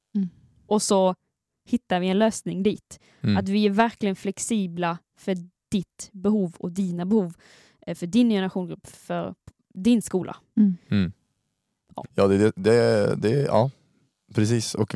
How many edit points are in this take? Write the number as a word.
one